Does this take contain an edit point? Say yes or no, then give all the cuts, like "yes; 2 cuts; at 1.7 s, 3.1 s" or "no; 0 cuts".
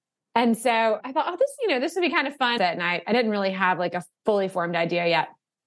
yes; 1 cut; at 2.6 s